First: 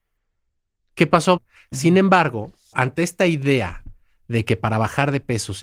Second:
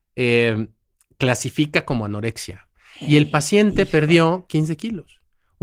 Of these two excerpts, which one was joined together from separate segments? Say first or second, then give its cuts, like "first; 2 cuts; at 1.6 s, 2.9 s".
first; 2 cuts; at 1.4 s, 2.7 s